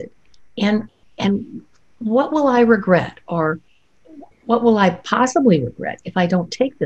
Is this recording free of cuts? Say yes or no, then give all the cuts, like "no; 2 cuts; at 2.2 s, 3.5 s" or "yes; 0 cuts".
no; 1 cut; at 3.2 s